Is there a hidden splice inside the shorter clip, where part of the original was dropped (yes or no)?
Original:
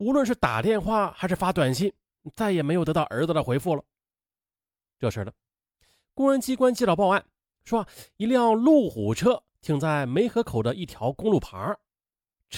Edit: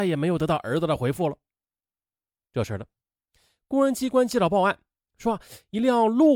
no